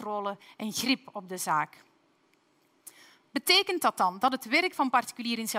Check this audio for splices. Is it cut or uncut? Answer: uncut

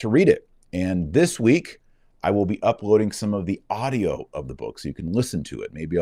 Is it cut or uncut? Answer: uncut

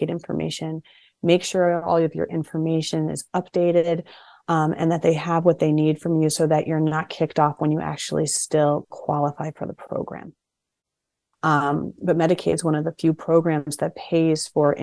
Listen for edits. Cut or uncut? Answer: cut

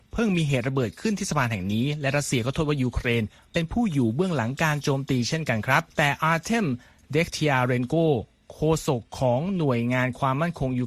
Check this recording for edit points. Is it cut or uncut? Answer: cut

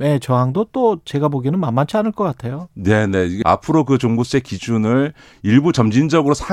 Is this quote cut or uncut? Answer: cut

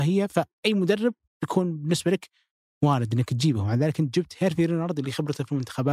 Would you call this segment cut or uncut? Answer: uncut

